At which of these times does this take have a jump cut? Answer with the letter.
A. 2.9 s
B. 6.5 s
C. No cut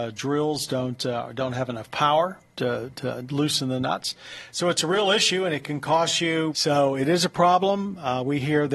B